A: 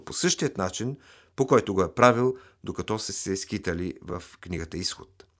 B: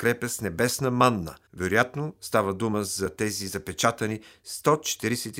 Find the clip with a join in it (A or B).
B